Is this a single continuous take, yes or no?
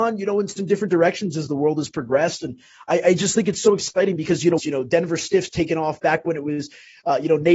no